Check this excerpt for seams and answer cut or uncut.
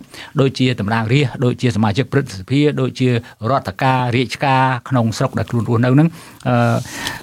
uncut